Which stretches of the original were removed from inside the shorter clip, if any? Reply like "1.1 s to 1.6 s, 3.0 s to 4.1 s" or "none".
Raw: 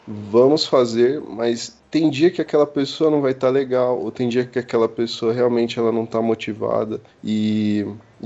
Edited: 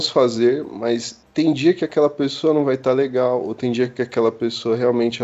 none